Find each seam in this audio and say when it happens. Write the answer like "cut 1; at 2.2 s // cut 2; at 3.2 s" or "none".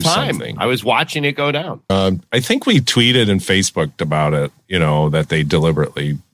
cut 1; at 1.9 s